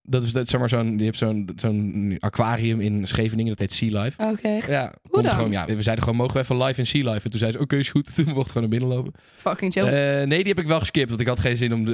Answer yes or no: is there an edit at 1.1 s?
no